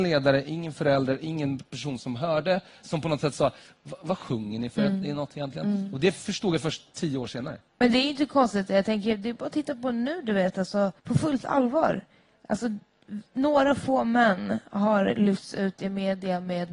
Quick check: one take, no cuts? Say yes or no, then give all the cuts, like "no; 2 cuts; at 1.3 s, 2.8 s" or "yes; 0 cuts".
no; 1 cut; at 11.0 s